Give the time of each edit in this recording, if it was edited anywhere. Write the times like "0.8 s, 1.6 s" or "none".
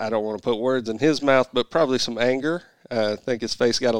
none